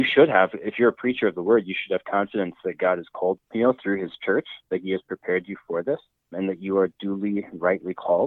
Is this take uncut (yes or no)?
no